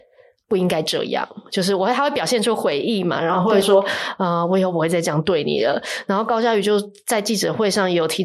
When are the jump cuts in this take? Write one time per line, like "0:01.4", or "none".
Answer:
0:03.6